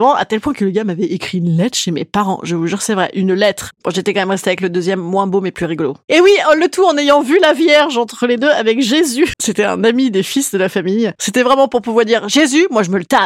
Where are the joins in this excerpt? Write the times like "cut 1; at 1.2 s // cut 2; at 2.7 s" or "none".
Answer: cut 1; at 3.7 s // cut 2; at 9.3 s